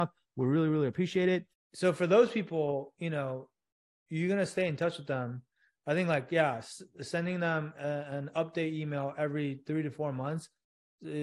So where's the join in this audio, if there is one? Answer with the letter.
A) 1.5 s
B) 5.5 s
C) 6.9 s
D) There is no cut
A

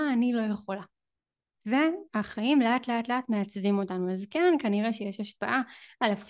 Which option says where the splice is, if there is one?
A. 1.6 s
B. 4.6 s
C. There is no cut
A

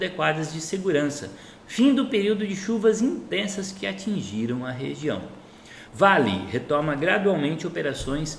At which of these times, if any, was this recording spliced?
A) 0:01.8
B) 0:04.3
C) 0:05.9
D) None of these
C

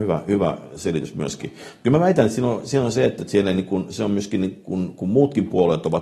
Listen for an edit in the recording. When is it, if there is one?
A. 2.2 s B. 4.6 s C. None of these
C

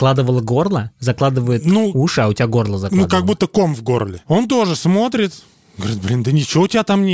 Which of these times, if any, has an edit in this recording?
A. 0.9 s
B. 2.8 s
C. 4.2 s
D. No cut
C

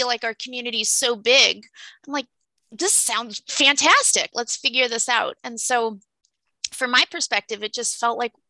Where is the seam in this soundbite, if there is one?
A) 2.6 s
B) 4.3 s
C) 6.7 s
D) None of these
B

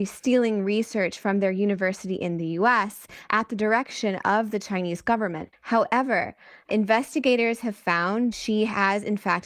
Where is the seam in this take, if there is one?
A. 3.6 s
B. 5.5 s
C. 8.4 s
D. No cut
B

